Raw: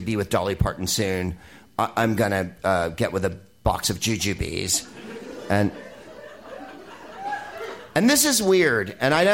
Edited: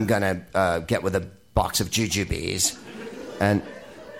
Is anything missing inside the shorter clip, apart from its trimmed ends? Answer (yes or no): no